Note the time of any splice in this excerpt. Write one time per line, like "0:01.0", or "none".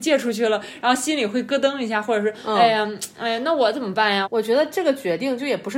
0:04.2